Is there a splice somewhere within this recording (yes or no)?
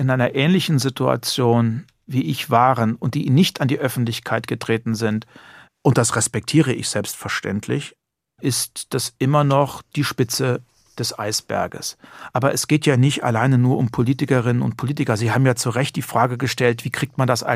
no